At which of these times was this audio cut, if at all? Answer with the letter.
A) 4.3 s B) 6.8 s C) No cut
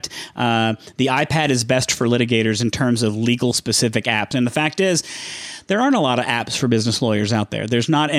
A